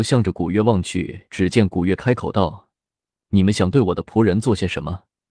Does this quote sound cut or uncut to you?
uncut